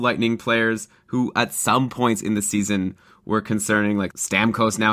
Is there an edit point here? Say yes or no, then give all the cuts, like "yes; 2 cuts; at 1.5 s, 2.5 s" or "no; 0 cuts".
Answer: no; 0 cuts